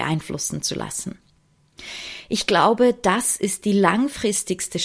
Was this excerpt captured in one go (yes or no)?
yes